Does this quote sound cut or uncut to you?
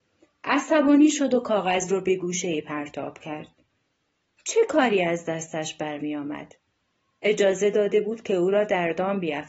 uncut